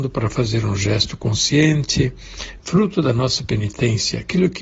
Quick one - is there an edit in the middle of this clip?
yes; 1 cut; at 2.6 s

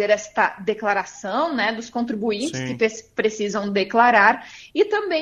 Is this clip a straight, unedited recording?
yes; 0 cuts

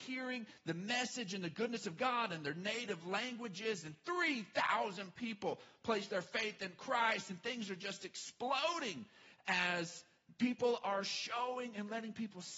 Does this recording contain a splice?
no; 0 cuts

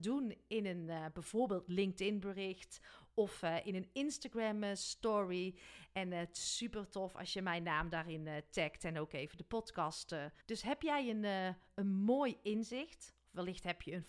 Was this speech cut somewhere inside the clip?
yes; 1 cut; at 10.4 s

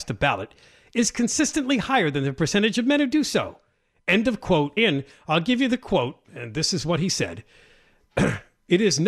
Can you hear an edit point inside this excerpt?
yes; 2 cuts; at 4.8 s, 6.2 s

